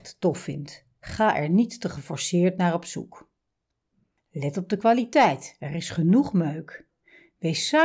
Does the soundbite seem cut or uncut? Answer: uncut